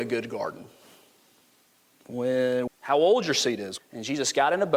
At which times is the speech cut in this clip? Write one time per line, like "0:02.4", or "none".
0:02.7
0:03.8